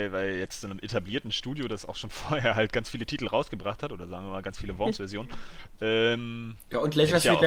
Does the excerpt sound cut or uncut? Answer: uncut